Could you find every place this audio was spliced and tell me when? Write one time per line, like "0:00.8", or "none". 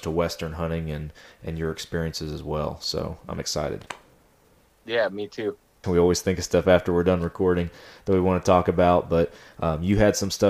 0:05.8